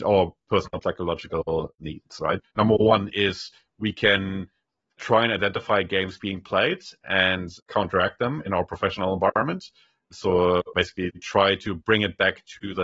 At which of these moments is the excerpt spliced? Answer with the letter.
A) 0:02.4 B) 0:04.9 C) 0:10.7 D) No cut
A